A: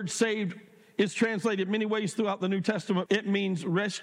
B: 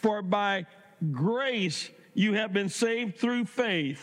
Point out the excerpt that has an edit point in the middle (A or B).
A